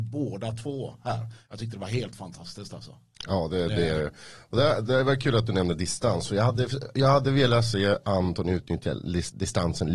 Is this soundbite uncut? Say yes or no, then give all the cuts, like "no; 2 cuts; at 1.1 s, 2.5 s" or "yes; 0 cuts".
yes; 0 cuts